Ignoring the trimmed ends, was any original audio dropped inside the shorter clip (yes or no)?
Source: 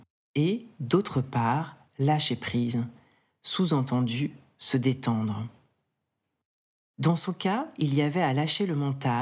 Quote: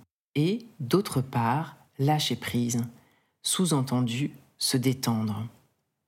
no